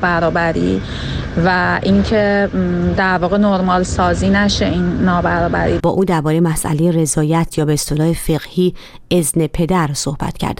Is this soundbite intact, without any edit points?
no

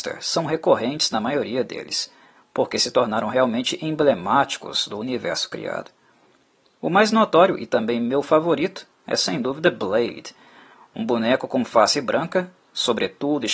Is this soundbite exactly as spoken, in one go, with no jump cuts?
yes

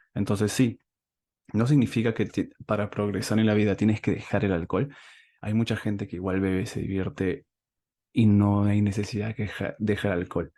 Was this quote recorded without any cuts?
yes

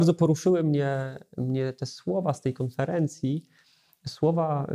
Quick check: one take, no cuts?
yes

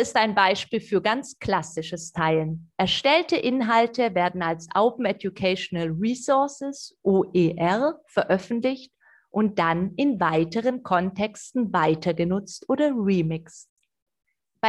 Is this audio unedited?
yes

